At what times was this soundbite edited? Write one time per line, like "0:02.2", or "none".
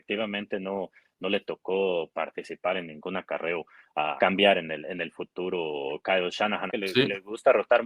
0:04.2
0:06.7